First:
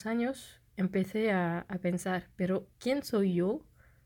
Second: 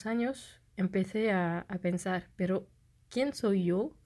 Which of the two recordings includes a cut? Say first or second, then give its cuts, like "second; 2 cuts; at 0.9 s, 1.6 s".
first; 1 cut; at 2.7 s